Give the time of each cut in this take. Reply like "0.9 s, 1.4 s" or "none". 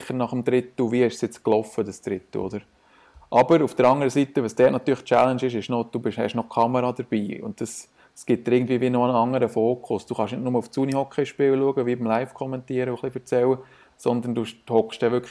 none